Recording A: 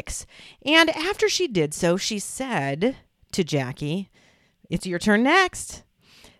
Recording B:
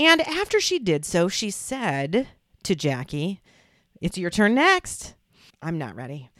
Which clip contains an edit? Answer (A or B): B